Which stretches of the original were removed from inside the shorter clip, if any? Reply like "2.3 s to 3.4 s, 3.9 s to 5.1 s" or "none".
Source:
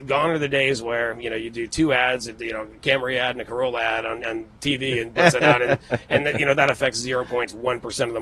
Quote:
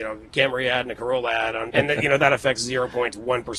4.2 s to 6.1 s